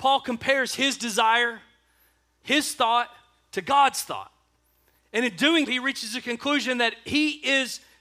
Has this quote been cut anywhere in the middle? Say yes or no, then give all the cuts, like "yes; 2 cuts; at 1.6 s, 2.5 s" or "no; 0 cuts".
yes; 1 cut; at 5.7 s